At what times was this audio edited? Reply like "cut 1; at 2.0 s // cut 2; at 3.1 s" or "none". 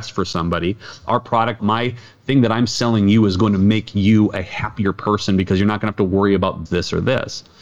cut 1; at 1.6 s // cut 2; at 6.7 s